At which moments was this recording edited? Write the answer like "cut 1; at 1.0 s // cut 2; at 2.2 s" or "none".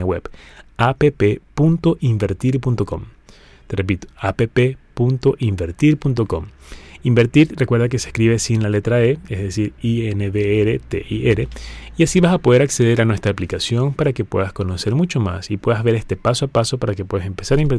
none